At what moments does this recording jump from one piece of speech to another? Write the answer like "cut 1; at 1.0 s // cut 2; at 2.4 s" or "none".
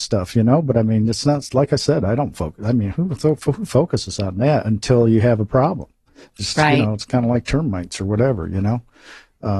none